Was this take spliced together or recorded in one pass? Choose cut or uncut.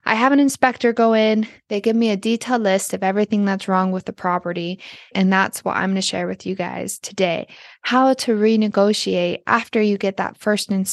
cut